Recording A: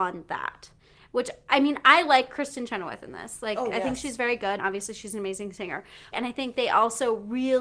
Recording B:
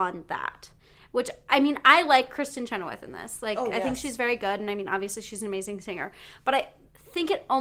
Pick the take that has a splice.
A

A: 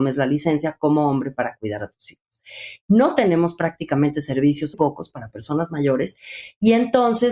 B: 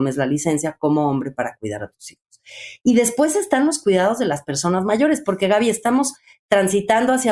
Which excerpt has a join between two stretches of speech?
A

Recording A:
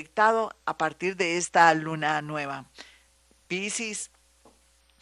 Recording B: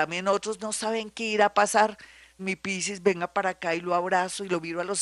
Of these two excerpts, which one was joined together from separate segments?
B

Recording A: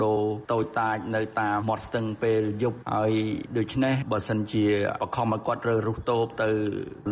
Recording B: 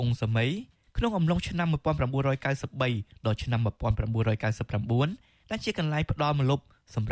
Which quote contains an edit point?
A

